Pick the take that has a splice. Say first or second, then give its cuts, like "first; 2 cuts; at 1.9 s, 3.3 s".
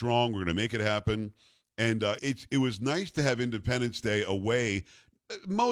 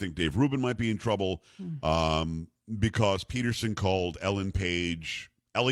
first; 1 cut; at 2.2 s